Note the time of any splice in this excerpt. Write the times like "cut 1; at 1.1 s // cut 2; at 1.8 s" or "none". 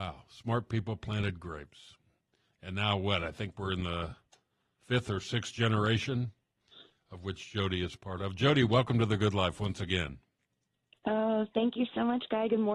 none